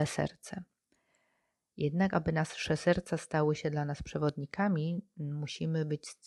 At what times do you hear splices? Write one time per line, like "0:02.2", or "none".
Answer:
none